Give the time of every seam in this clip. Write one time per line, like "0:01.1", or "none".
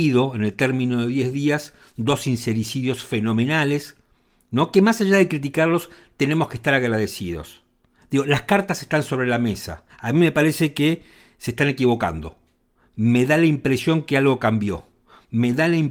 0:09.9